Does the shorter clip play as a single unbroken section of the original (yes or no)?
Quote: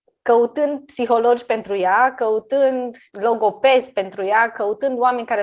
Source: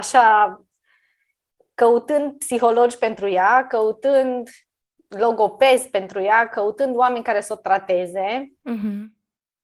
no